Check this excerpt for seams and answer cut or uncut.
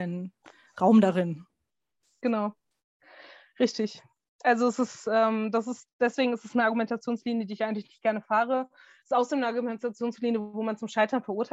uncut